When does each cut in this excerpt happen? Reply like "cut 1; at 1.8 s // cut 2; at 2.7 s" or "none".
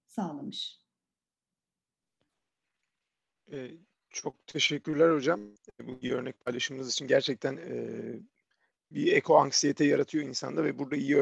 cut 1; at 8.9 s